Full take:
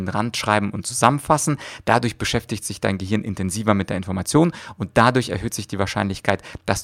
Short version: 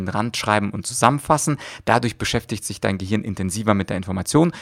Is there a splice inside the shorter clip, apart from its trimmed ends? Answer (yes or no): no